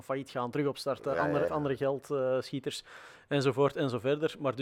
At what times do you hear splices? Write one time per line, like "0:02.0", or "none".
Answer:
0:01.5